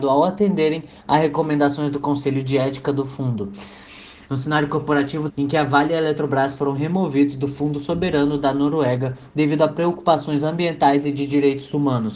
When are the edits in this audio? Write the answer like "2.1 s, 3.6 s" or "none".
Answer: 4.2 s, 5.3 s, 9.3 s